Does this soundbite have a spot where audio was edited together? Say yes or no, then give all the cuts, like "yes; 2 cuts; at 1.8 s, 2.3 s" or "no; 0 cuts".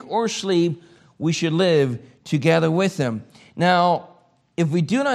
no; 0 cuts